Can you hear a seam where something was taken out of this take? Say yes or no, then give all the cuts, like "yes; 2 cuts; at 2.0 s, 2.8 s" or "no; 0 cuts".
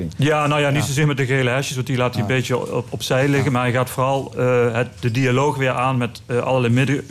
no; 0 cuts